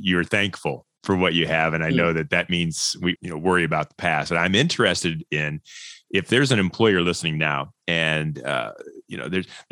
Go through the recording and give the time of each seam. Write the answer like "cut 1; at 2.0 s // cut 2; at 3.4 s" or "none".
cut 1; at 3.2 s